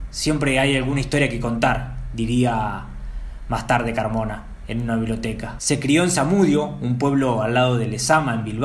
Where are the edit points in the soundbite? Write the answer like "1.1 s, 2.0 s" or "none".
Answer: 5.6 s